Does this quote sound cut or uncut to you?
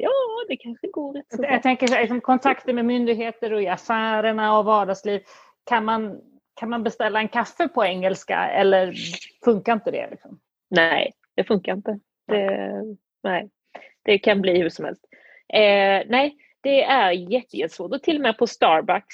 uncut